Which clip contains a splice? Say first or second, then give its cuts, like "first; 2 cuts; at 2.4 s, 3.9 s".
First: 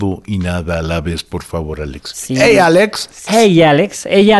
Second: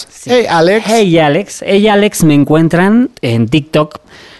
first; 1 cut; at 3.3 s